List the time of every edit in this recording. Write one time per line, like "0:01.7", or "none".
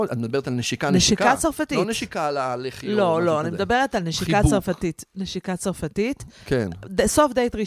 none